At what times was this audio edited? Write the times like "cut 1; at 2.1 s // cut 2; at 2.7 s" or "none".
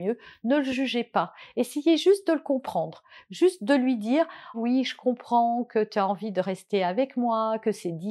cut 1; at 4.5 s